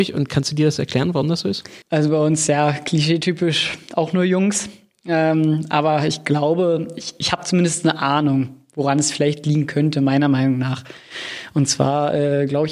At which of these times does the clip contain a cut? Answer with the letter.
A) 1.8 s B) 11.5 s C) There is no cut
A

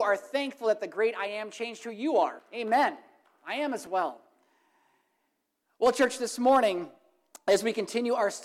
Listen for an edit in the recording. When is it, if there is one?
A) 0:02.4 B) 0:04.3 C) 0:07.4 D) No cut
A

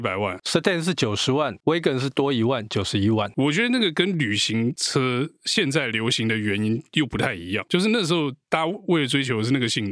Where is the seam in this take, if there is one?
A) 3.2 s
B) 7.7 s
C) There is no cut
C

